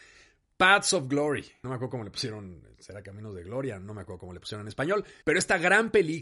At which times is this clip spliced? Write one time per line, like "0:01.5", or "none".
0:05.2